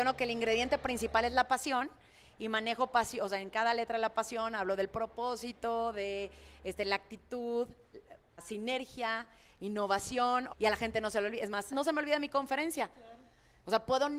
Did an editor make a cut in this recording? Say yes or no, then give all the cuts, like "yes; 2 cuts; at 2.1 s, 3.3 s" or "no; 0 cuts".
yes; 3 cuts; at 8.4 s, 10.5 s, 11.7 s